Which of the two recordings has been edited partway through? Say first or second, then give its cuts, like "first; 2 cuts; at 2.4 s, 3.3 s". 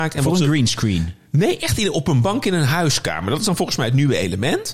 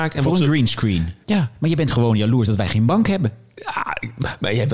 second; 1 cut; at 1.2 s